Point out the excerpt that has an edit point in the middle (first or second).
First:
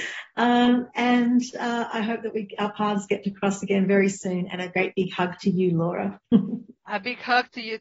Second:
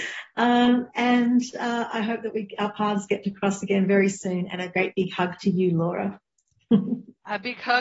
first